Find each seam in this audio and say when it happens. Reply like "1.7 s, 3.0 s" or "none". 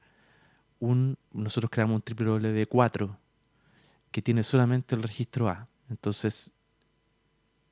1.3 s, 5.8 s